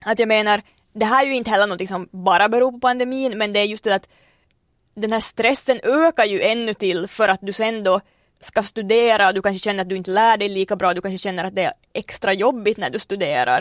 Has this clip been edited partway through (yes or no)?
no